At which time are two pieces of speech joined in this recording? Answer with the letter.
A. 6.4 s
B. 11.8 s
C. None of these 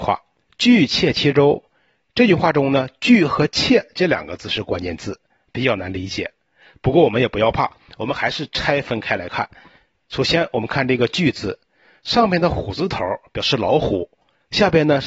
C